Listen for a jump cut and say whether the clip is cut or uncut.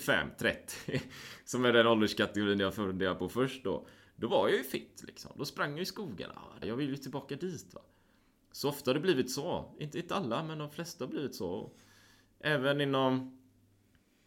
cut